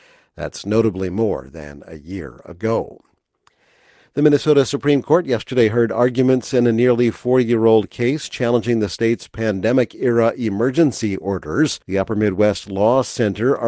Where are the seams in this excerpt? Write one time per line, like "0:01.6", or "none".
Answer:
0:11.8